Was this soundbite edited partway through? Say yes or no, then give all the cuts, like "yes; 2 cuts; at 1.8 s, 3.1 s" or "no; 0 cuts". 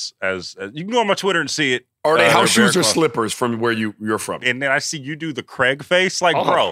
yes; 1 cut; at 4.4 s